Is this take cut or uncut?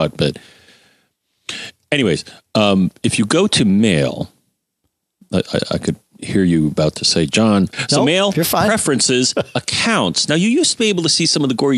cut